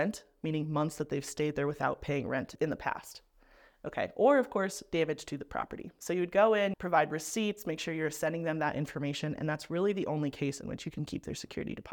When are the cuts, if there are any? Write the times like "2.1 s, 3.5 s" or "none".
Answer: 6.7 s